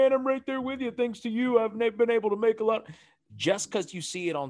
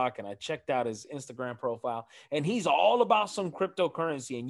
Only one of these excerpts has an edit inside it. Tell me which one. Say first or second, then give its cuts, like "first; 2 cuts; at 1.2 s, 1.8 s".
first; 1 cut; at 3.3 s